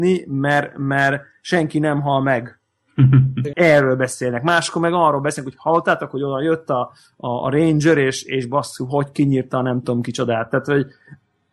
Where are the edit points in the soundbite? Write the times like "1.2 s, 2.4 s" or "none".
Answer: 3.5 s